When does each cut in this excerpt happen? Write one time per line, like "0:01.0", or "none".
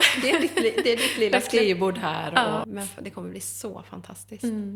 0:02.6